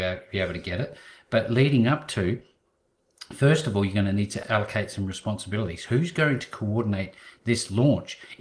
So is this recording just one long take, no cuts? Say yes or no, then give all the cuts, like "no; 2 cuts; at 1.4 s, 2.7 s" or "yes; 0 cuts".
no; 1 cut; at 4.4 s